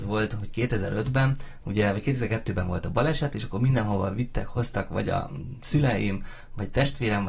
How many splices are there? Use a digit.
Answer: 0